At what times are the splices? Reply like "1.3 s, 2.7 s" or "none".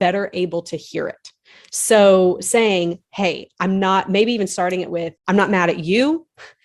5.2 s